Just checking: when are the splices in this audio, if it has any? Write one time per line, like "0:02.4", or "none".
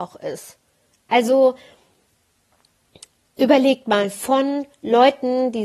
none